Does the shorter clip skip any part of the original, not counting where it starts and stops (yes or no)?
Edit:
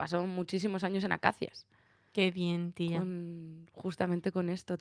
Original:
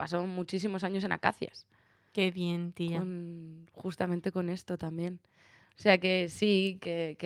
no